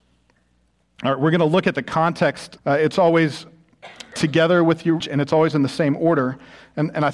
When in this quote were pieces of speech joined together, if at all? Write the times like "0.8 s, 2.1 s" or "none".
2.6 s, 5.0 s